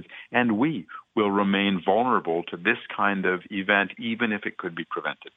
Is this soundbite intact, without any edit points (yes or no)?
yes